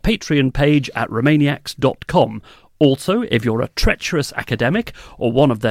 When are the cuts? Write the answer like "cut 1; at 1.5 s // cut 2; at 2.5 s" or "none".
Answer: none